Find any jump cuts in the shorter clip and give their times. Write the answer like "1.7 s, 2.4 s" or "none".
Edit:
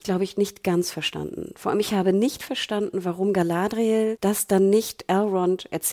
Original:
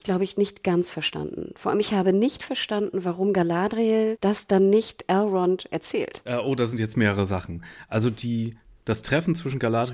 none